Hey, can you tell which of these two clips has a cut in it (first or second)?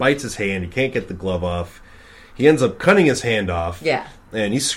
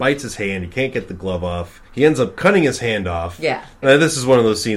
second